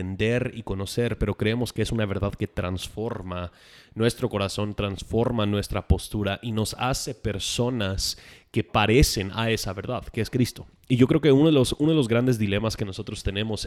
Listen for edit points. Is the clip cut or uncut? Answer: uncut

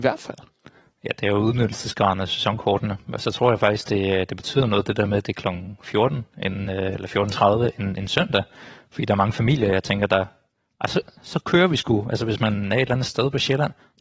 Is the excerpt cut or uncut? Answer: uncut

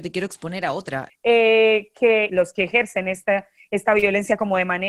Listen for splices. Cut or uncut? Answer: cut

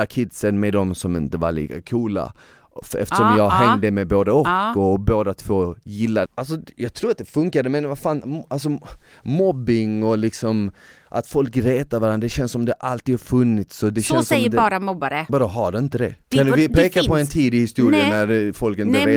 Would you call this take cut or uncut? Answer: cut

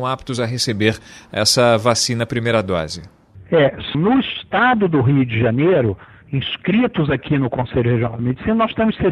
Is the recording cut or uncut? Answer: cut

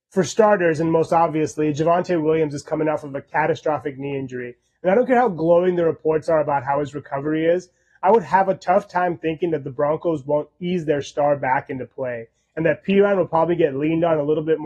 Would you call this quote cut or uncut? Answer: uncut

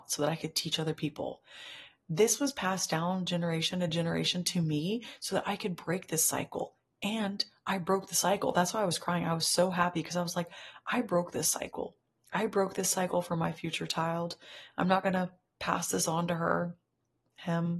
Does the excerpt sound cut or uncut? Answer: uncut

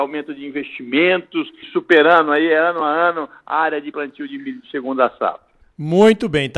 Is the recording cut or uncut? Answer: cut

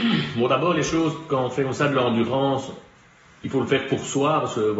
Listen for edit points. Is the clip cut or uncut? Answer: uncut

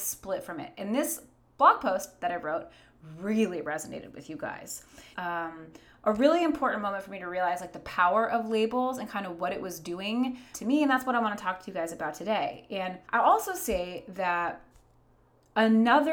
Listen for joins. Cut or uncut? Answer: cut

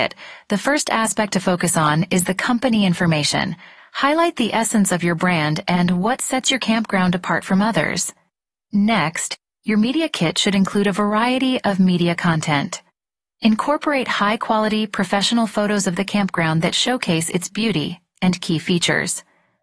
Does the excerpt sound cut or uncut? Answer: cut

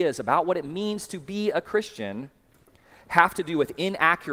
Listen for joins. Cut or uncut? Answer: uncut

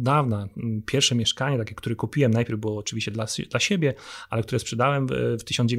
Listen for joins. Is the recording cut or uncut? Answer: uncut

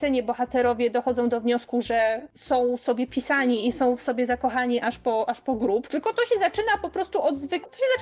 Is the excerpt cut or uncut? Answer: uncut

